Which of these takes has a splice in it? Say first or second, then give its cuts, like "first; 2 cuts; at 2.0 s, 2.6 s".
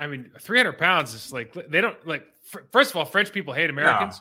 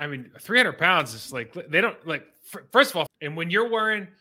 second; 1 cut; at 3.1 s